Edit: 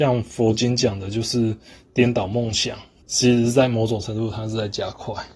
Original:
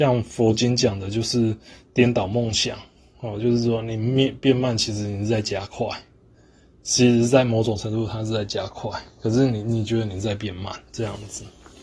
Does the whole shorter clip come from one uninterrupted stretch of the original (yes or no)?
no